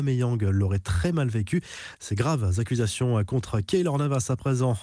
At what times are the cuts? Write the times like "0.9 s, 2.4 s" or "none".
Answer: none